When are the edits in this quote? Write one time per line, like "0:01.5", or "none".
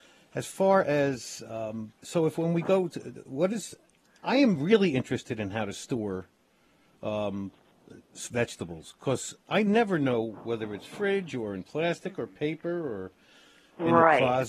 0:02.0